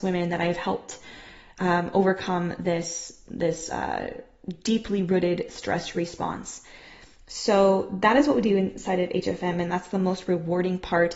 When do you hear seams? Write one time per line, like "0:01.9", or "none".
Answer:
none